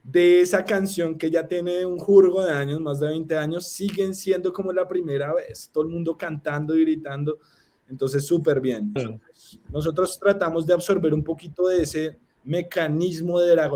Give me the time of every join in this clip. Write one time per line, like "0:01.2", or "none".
0:09.0